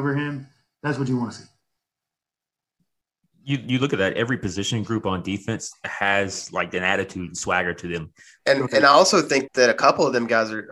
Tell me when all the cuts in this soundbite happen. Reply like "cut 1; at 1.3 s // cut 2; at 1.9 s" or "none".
cut 1; at 8.4 s // cut 2; at 9.5 s